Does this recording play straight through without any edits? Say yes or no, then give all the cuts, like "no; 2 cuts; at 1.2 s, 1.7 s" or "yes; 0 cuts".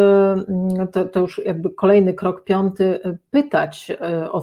yes; 0 cuts